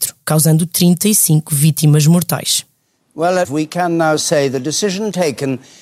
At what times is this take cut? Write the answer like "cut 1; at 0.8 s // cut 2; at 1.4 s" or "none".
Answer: cut 1; at 3.4 s